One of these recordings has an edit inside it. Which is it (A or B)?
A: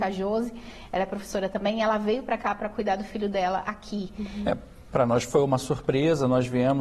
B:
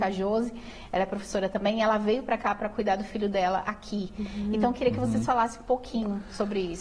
A